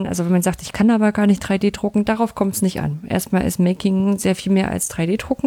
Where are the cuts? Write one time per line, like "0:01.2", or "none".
none